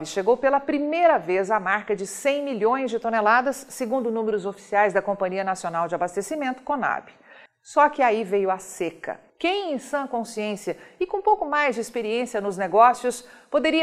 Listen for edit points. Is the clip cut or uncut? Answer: cut